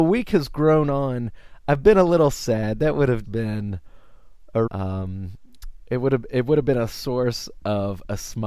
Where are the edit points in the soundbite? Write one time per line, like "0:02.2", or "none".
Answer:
0:03.2
0:04.7